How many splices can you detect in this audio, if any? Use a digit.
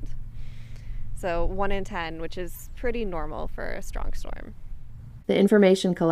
1